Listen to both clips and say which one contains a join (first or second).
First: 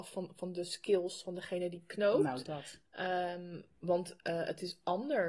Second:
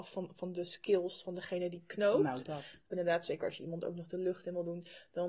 second